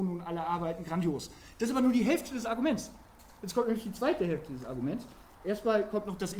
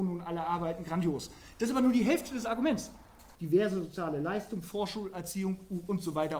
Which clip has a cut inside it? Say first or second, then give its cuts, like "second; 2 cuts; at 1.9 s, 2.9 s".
second; 1 cut; at 3.3 s